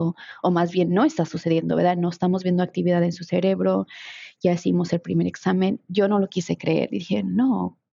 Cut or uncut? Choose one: uncut